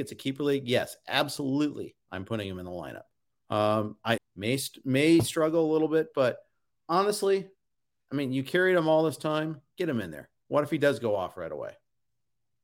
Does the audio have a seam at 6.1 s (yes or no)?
no